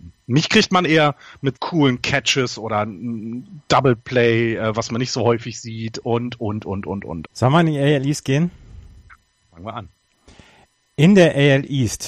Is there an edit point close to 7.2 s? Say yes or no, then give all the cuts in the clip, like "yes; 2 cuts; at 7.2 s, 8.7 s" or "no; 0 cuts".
yes; 2 cuts; at 1.5 s, 7.2 s